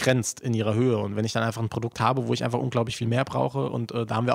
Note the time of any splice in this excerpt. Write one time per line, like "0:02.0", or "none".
none